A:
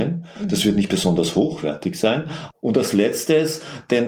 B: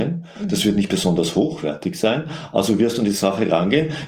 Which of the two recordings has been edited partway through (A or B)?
A